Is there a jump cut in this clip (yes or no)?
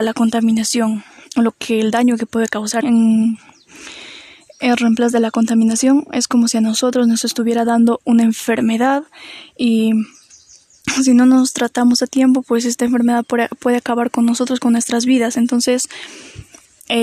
yes